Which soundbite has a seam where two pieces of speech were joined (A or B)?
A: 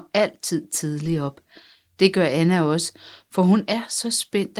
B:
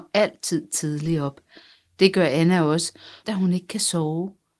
B